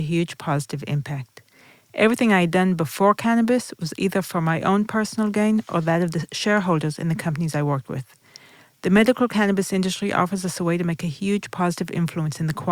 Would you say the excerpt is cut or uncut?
uncut